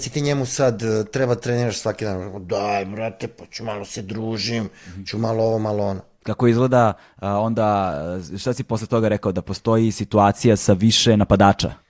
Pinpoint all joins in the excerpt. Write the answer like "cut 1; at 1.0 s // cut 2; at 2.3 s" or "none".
none